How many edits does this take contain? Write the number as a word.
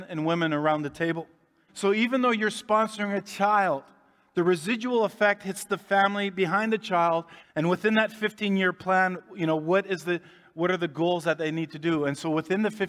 two